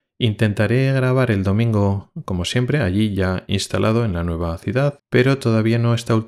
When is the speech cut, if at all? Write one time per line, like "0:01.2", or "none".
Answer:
0:05.0

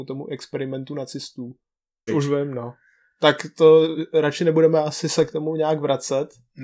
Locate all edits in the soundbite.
0:02.1

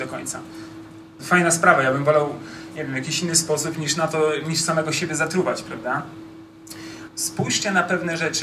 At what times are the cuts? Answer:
0:01.2
0:07.1

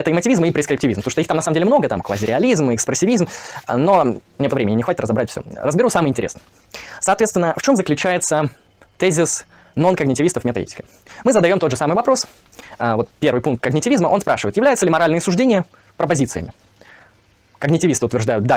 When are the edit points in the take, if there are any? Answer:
0:04.5

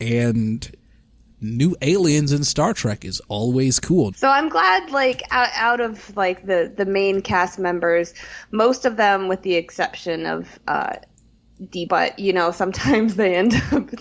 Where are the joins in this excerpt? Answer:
0:04.1
0:11.9

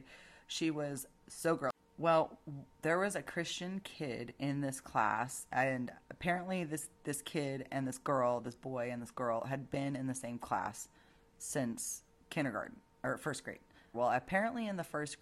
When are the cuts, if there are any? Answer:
0:07.0
0:13.9

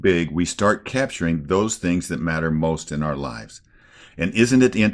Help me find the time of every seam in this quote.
none

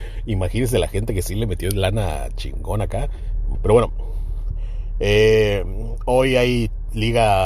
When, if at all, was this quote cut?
0:03.5

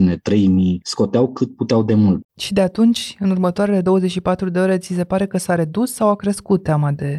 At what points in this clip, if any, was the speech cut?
0:02.2

